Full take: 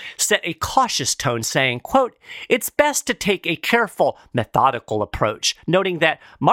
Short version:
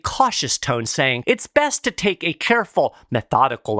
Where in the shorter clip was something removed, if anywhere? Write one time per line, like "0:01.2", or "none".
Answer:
0:01.2